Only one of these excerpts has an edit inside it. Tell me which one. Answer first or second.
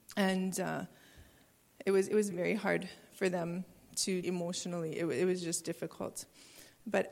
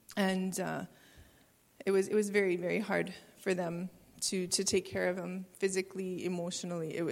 first